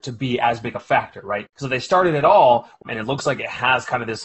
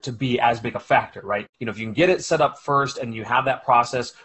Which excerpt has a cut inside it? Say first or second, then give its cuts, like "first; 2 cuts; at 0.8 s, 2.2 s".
first; 2 cuts; at 1.5 s, 2.8 s